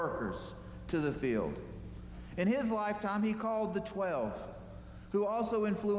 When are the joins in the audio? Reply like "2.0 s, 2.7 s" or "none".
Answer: none